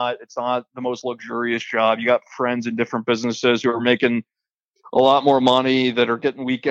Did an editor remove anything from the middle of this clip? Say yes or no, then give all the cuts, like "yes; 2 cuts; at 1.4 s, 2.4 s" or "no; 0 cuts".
no; 0 cuts